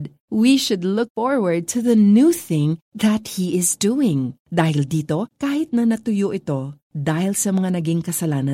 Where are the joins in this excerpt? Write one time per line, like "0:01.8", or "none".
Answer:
0:05.3